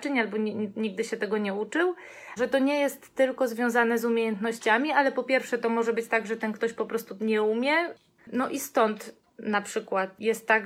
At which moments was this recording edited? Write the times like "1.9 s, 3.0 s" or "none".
2.4 s, 8.2 s